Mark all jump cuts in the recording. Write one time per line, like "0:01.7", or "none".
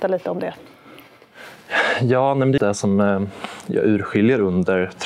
0:02.6